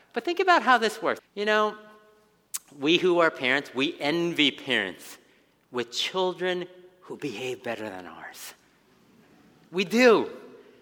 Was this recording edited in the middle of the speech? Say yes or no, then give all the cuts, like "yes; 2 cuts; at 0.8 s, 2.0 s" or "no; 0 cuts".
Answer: yes; 1 cut; at 1.2 s